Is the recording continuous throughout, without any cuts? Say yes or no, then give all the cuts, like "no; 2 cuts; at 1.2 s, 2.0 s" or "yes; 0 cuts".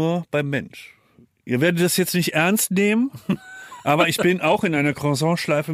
yes; 0 cuts